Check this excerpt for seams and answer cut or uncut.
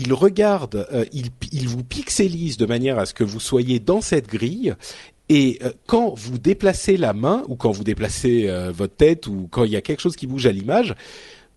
uncut